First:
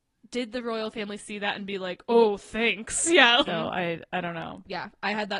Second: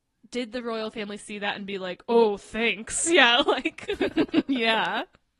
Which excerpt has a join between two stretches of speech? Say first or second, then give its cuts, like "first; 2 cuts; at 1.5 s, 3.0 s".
first; 1 cut; at 3.5 s